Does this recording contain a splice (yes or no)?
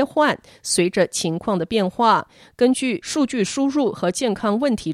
no